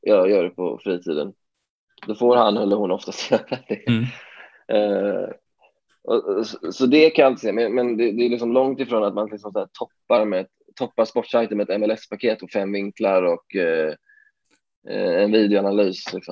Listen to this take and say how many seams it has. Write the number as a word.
zero